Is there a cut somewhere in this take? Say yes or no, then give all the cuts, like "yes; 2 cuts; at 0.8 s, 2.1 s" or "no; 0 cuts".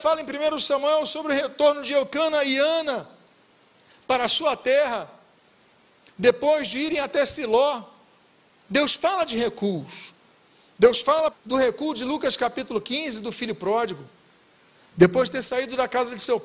yes; 1 cut; at 11.3 s